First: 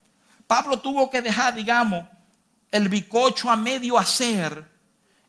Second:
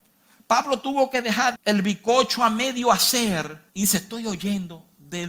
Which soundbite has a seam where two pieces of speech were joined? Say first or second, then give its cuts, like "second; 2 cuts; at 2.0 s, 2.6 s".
second; 2 cuts; at 1.5 s, 3.7 s